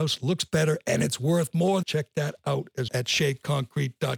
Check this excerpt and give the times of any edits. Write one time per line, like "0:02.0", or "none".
0:01.8
0:02.9